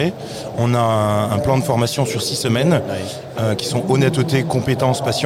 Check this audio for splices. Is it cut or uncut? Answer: cut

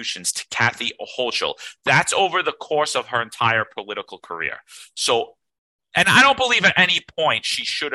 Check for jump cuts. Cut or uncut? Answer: uncut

